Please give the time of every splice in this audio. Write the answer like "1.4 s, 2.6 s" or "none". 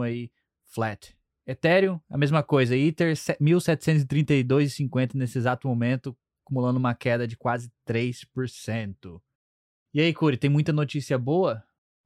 none